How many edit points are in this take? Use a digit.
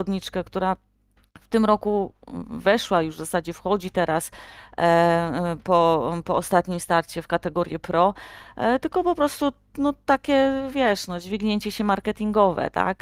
0